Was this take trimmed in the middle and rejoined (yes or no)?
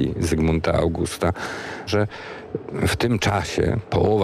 yes